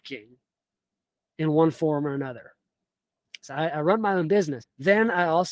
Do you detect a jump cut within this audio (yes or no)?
yes